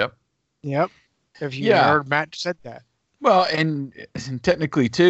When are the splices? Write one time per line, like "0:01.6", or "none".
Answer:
0:01.3